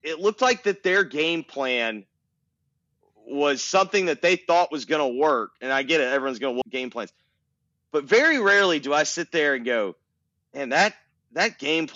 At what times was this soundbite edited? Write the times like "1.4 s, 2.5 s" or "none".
6.6 s